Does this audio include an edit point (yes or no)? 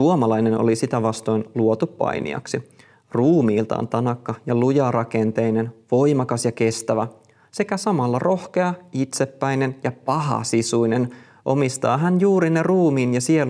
no